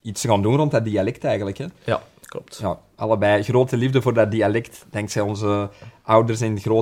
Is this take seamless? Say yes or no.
yes